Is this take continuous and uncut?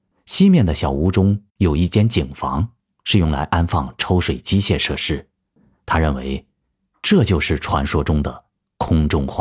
yes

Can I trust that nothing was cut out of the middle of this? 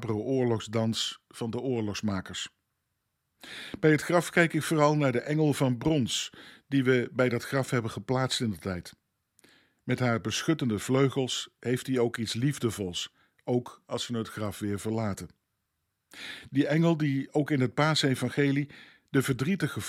yes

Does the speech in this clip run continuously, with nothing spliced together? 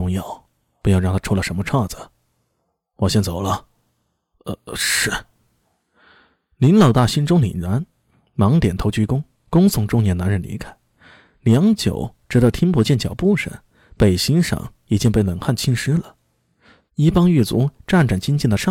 no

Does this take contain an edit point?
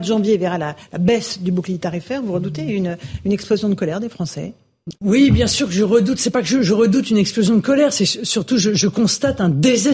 yes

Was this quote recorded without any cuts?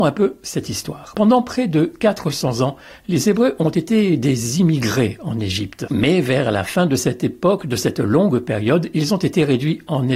yes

